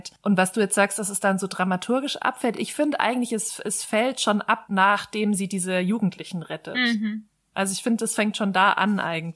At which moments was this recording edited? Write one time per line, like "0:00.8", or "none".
none